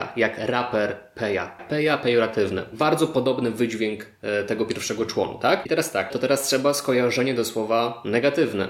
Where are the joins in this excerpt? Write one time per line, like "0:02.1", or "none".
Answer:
0:01.6
0:06.1